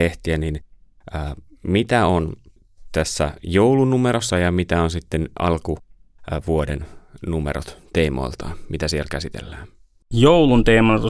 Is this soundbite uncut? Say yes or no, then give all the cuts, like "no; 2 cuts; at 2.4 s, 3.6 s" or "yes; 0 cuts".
no; 1 cut; at 4.3 s